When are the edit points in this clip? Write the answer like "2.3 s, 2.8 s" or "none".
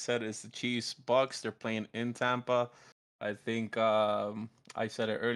none